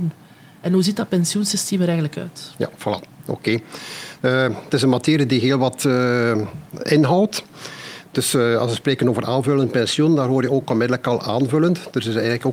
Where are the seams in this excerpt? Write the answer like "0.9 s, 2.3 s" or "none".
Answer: none